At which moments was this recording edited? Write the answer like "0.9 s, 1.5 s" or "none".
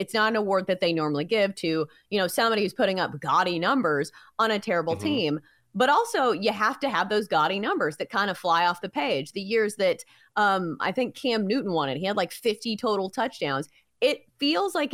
13.8 s